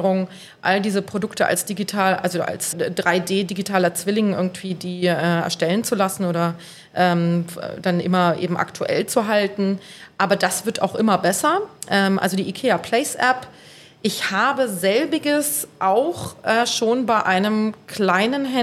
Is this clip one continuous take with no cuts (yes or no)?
no